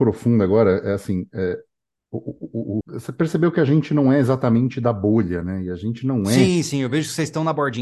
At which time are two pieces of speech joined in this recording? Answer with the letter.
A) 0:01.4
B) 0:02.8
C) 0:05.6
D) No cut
B